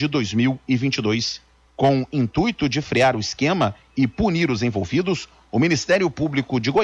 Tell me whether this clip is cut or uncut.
cut